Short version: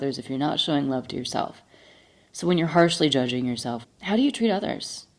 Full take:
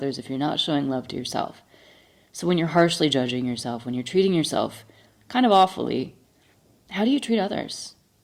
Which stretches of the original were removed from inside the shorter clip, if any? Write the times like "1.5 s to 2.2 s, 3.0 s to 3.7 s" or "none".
3.8 s to 6.7 s